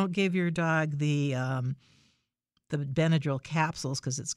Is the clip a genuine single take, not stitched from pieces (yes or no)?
yes